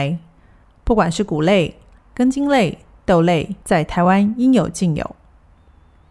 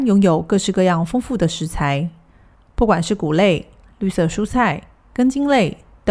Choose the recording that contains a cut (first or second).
first